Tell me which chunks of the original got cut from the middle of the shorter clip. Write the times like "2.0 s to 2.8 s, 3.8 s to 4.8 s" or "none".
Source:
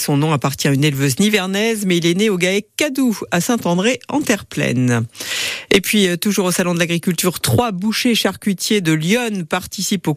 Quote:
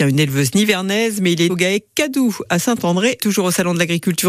2.1 s to 2.3 s, 4.0 s to 6.2 s